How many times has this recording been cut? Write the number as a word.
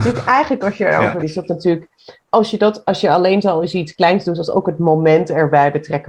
one